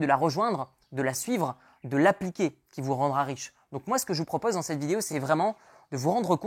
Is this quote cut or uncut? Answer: uncut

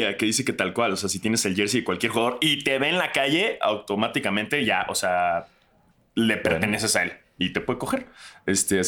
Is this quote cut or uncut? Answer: uncut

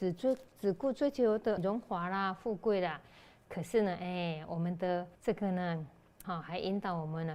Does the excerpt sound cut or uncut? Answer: cut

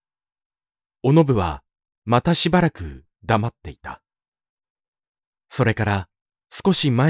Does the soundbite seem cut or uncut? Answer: uncut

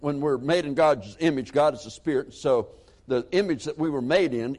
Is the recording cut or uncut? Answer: uncut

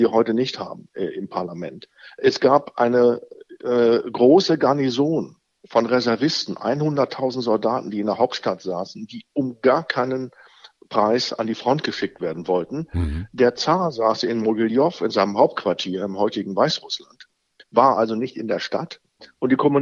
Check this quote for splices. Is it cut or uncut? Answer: uncut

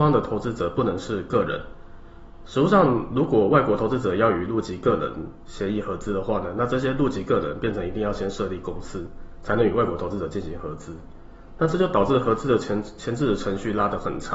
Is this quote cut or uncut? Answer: uncut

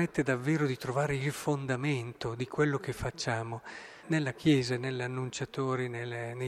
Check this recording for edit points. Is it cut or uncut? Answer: cut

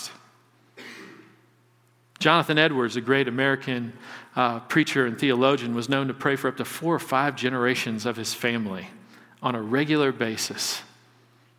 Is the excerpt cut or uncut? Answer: uncut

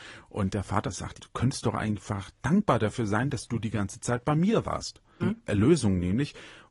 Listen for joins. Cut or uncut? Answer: cut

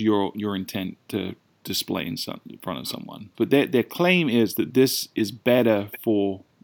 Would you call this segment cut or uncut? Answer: cut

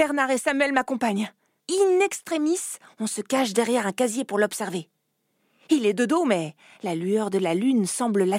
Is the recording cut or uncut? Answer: cut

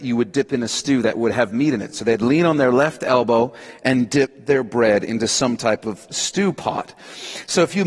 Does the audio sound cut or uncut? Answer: uncut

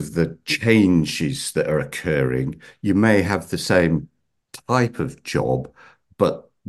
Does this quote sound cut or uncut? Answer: uncut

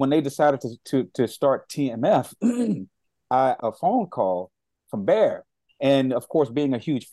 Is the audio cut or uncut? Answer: cut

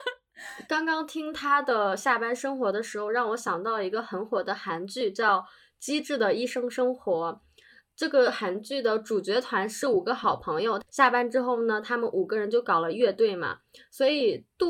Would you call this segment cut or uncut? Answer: cut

